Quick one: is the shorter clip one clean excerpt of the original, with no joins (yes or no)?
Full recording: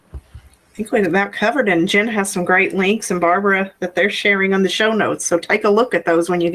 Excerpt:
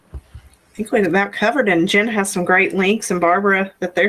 yes